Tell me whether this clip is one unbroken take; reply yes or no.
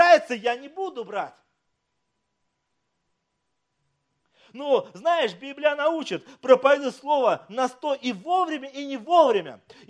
yes